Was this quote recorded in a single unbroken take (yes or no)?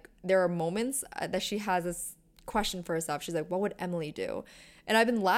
yes